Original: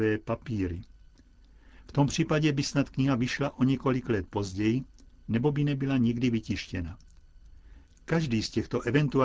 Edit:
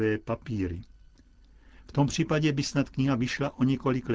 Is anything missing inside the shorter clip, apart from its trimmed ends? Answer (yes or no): no